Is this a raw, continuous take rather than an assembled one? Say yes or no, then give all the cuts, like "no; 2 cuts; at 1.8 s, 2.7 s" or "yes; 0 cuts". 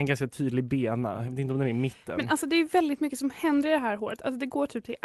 yes; 0 cuts